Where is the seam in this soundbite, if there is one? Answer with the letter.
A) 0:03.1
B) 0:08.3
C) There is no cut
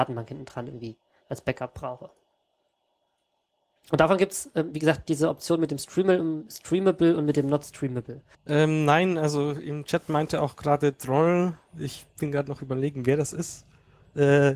B